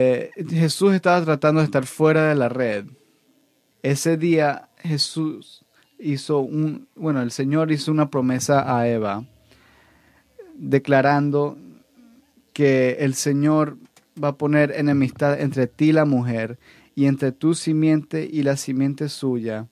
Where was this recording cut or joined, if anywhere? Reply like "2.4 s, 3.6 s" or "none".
3.7 s